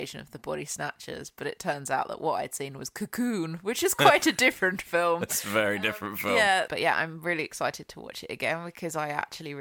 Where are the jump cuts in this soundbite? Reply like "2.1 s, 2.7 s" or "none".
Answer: 6.7 s